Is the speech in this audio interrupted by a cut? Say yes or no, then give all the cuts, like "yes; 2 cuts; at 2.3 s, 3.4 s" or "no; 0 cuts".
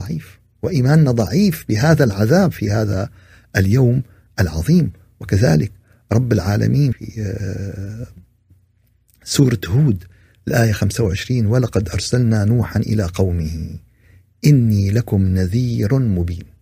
yes; 1 cut; at 6.9 s